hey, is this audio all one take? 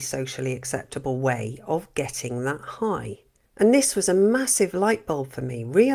no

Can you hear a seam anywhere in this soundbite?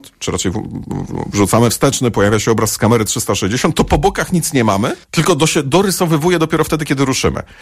yes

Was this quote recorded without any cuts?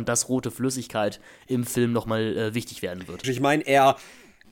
no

